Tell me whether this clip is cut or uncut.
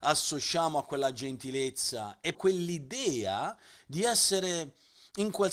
cut